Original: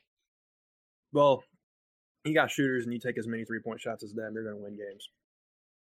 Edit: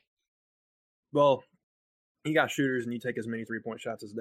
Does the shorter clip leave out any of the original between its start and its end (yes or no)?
no